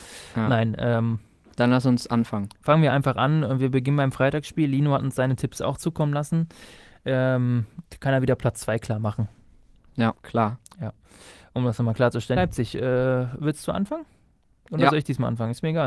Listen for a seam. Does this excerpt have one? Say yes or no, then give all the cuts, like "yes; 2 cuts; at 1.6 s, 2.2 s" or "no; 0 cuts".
yes; 2 cuts; at 10.1 s, 12.4 s